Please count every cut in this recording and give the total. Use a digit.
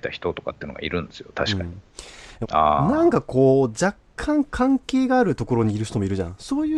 1